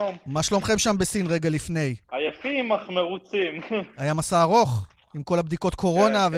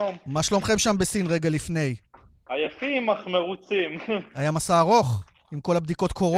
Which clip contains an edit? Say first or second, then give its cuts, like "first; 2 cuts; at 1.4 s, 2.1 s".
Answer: first; 1 cut; at 2.0 s